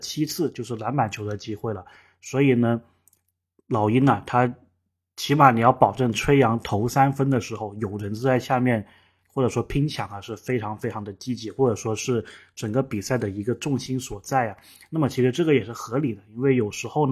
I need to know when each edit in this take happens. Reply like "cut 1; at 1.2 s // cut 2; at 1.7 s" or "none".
cut 1; at 9.2 s